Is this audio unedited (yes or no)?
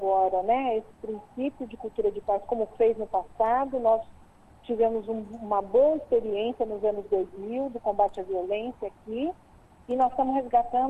yes